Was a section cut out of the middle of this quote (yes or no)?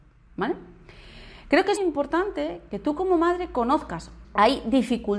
yes